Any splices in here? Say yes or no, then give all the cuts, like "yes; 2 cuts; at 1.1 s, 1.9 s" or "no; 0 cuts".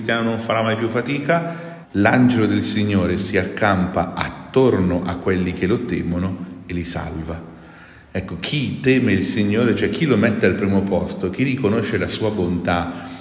yes; 1 cut; at 1.8 s